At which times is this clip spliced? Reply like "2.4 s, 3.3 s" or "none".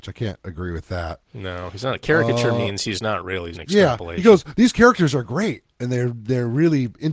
1.3 s, 3.5 s